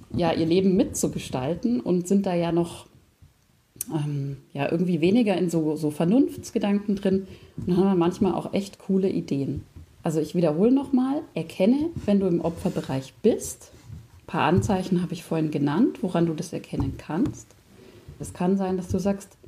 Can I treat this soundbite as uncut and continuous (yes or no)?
no